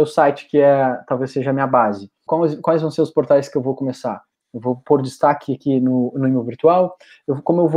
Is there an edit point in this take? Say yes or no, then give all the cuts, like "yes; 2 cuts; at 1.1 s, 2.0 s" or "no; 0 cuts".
yes; 1 cut; at 2.3 s